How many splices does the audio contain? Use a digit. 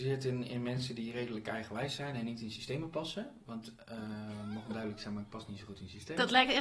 0